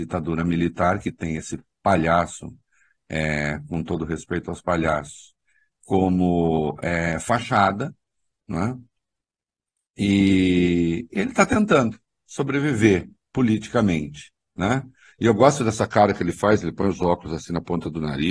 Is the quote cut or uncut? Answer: uncut